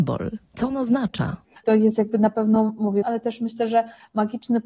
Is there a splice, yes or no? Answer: yes